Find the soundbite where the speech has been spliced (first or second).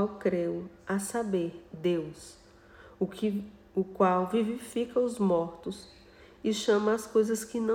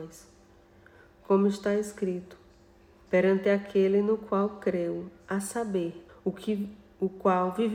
second